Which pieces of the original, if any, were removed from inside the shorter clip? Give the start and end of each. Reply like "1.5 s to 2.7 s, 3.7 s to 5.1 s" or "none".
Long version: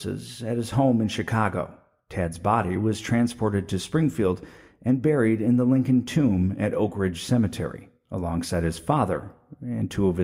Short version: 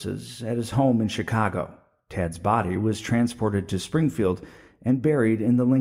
none